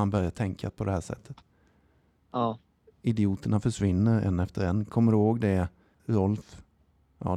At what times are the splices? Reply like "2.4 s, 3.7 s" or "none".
6.0 s